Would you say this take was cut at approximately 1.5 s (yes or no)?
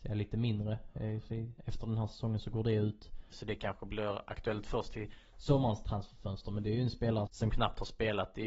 no